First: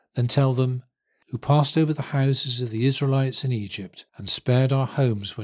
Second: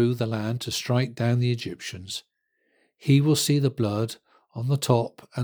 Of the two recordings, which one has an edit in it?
first; 2 cuts; at 1.2 s, 4.1 s

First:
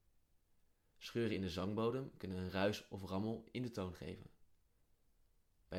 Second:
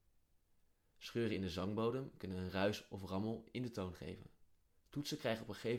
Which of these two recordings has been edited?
second; 1 cut; at 4.7 s

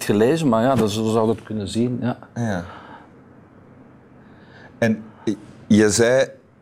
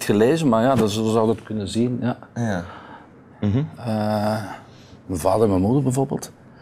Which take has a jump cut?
second; 1 cut; at 3.3 s

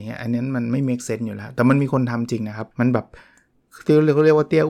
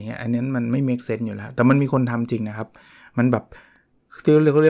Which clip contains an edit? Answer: first; 1 cut; at 2.7 s

